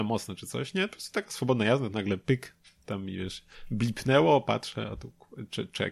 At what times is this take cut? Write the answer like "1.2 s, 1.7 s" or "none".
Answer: none